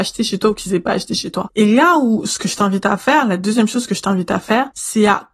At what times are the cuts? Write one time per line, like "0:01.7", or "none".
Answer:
0:01.5